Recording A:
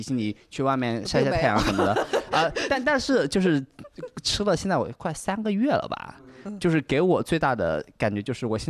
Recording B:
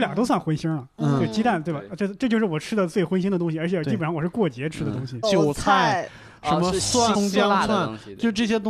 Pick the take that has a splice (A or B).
B